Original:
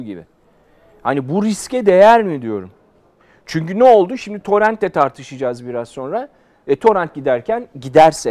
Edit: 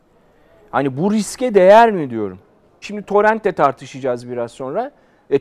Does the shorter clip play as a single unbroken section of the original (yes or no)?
no